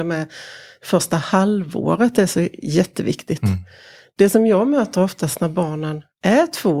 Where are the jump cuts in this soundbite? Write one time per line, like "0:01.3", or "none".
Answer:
none